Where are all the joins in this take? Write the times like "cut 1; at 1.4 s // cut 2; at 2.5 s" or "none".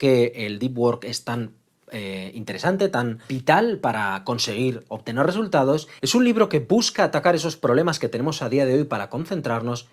cut 1; at 6.0 s